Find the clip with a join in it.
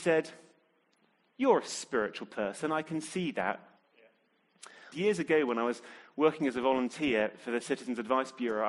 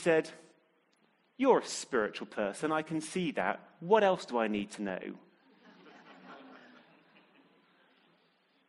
first; 2 cuts; at 3.8 s, 4.9 s

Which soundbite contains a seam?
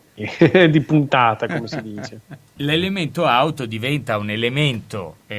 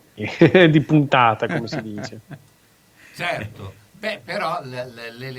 first; 1 cut; at 2.6 s

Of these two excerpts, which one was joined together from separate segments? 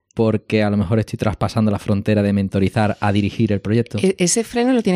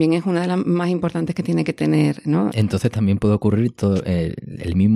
second; 1 cut; at 2.5 s

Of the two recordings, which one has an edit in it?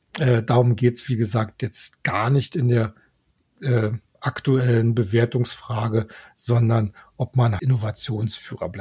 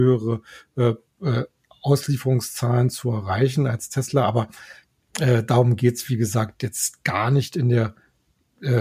first; 1 cut; at 7.6 s

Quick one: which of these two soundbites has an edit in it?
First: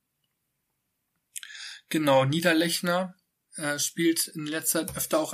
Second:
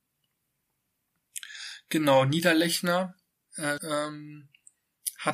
second; 1 cut; at 3.8 s

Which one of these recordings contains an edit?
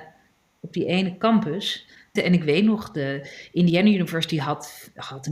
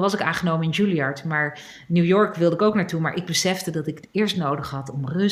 first; 1 cut; at 2.2 s

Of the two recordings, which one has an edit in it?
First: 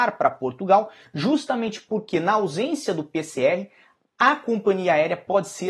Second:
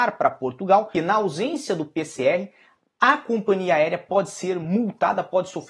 second; 1 cut; at 0.9 s

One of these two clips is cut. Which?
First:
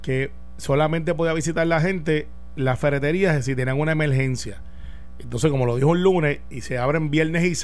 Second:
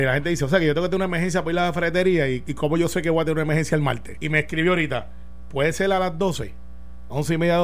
second; 1 cut; at 4.2 s

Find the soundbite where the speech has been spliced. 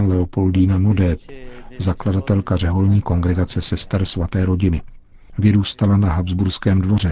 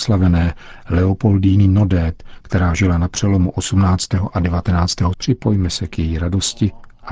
second; 1 cut; at 5.1 s

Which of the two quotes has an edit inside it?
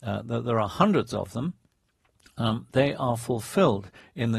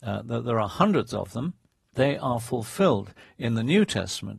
second; 1 cut; at 1.9 s

